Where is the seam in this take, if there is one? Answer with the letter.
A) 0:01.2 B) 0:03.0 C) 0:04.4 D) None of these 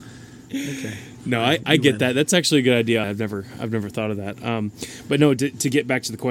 B